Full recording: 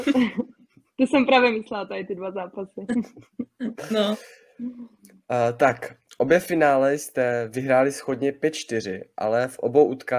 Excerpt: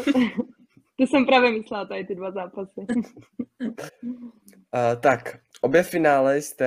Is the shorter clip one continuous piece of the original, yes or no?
no